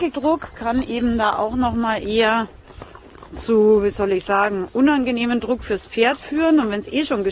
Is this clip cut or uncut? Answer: uncut